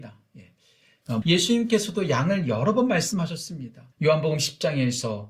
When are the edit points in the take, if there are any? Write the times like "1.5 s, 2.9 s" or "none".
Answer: 1.2 s, 3.9 s